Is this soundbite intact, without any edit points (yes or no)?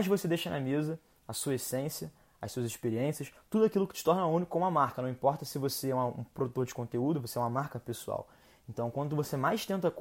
yes